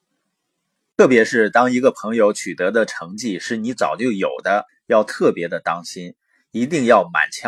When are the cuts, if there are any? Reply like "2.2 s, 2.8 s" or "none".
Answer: 4.7 s